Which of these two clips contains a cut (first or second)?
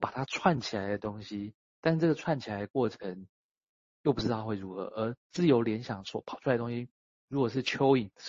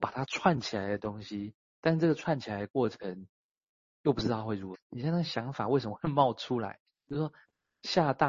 second